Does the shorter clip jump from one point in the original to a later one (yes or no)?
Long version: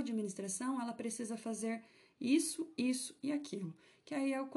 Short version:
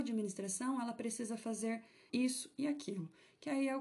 yes